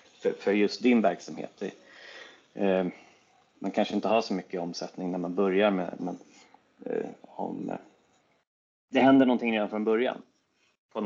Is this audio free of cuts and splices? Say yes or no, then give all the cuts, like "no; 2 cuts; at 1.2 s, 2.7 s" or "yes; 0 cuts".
no; 2 cuts; at 6.0 s, 7.2 s